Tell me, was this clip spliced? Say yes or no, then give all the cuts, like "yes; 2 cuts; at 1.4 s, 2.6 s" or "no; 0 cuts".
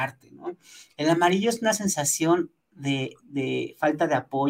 no; 0 cuts